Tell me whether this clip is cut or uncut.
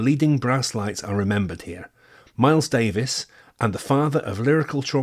cut